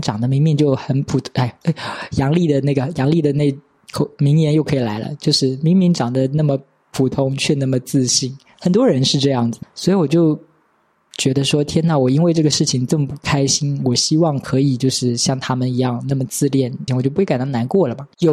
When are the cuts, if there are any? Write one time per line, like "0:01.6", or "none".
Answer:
0:09.6
0:16.9